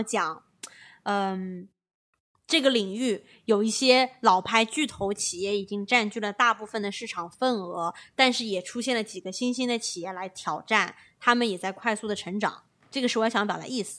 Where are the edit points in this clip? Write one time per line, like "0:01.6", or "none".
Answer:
none

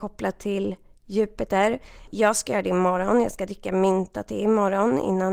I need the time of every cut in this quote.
0:02.1

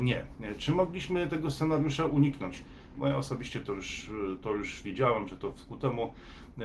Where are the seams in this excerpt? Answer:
0:02.9

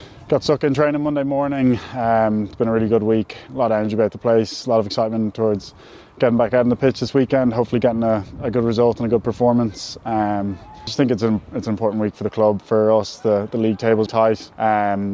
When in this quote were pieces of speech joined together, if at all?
0:14.1

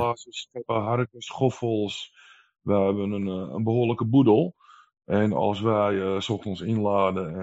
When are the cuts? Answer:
none

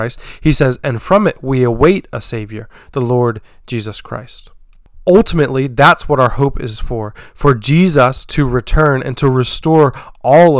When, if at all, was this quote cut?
none

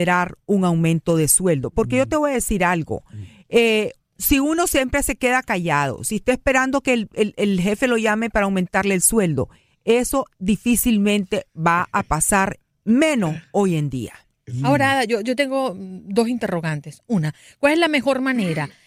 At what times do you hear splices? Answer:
none

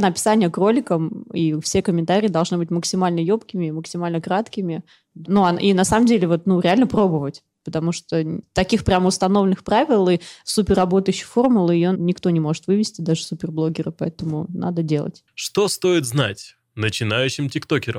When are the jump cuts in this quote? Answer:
0:05.2
0:11.9

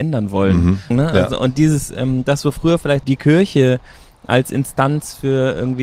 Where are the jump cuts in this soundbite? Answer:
0:00.9
0:03.0

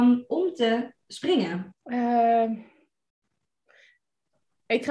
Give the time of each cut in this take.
0:01.7

